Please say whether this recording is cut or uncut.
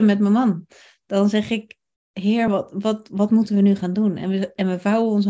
uncut